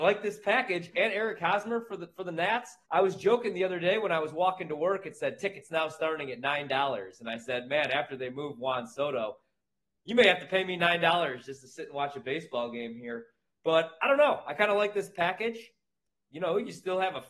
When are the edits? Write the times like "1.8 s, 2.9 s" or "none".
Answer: 2.8 s